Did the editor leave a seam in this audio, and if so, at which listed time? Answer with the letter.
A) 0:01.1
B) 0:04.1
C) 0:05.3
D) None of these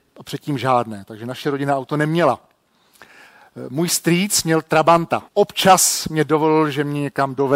C